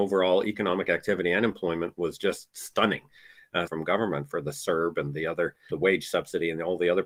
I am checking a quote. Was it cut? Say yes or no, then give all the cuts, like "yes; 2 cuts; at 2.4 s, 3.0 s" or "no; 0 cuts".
yes; 2 cuts; at 3.7 s, 5.7 s